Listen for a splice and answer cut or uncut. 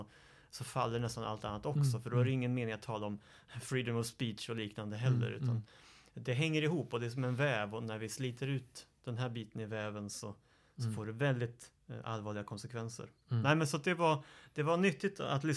uncut